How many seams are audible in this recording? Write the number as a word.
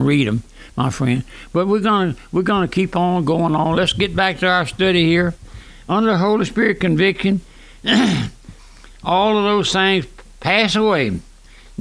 zero